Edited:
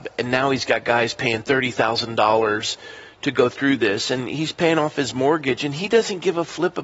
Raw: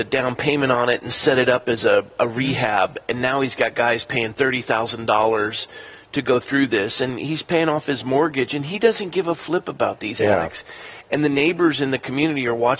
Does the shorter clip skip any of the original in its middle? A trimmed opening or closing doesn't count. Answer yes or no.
no